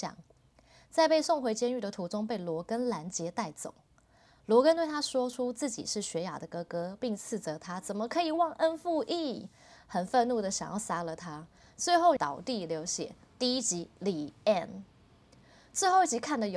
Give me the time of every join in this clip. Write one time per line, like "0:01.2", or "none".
0:12.2